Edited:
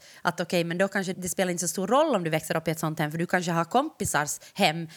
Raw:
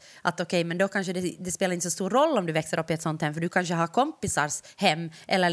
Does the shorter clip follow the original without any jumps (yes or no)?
no